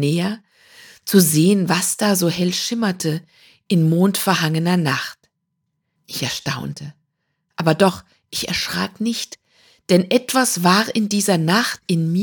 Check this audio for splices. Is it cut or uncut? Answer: cut